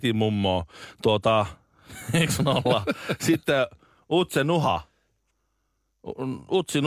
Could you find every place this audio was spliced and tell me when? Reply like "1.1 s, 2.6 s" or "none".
none